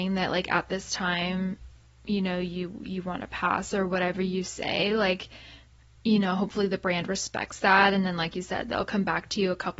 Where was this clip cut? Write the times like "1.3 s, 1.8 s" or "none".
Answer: none